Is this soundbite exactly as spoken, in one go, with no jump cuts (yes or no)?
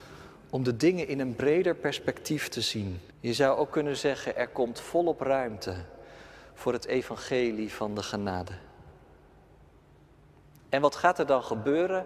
no